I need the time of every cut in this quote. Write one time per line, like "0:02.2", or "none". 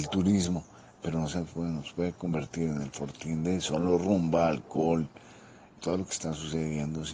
0:05.8